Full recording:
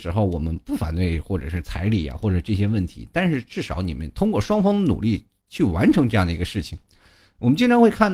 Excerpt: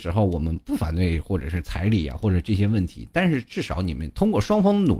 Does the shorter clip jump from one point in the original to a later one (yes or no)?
no